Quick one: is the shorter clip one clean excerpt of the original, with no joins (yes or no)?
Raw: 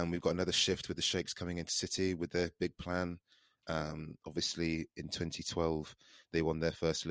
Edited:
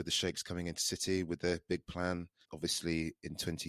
no